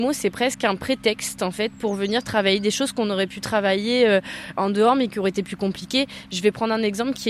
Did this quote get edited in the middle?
no; 0 cuts

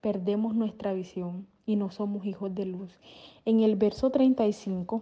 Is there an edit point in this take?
no; 0 cuts

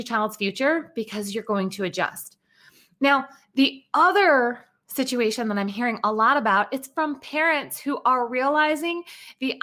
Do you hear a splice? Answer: no; 0 cuts

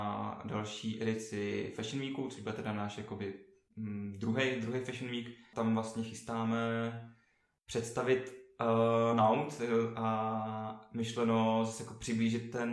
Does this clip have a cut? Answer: no; 0 cuts

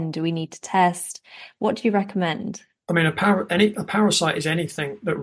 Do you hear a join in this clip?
no; 0 cuts

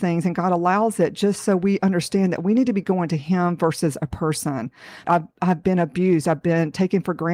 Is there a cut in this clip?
yes; 1 cut; at 5.0 s

